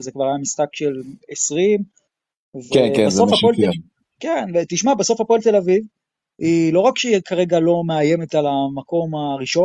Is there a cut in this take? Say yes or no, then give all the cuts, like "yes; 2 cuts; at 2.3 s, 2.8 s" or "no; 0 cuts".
no; 0 cuts